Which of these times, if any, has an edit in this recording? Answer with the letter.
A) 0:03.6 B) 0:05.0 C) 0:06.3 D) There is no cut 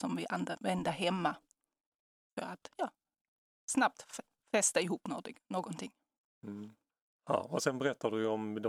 D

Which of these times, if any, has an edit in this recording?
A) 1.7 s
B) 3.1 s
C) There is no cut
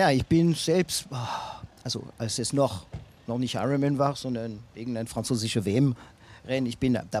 C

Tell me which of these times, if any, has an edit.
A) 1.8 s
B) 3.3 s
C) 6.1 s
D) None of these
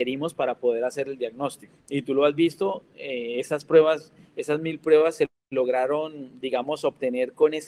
A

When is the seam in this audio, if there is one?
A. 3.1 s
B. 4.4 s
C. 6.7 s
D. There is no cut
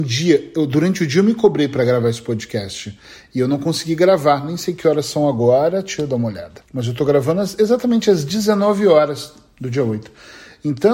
C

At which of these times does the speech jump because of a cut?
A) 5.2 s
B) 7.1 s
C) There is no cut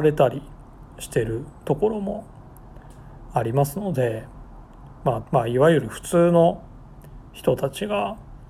A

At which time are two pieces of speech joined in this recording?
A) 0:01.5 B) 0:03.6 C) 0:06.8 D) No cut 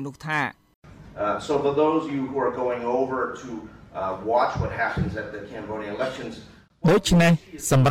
D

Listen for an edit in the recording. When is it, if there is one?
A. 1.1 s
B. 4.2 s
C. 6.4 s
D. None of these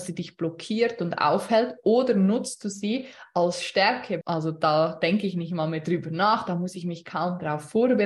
B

